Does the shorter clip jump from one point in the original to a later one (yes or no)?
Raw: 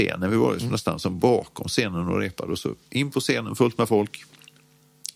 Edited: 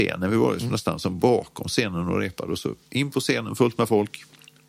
no